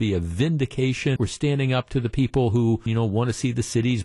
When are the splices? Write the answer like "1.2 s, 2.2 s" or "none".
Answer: 1.2 s, 2.9 s